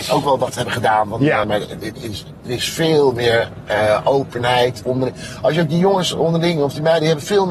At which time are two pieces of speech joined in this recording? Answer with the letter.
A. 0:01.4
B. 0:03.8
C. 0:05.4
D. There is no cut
A